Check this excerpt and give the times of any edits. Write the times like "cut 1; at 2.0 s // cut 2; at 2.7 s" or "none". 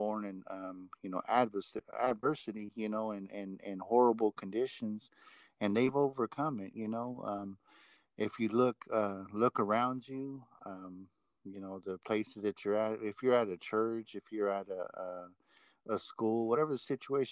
none